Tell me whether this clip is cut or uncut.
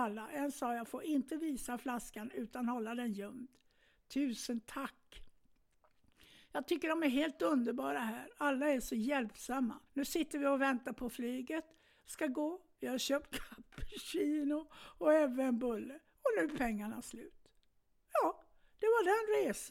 cut